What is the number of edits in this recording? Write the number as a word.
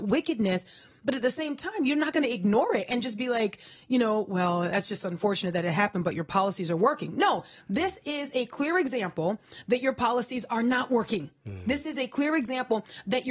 zero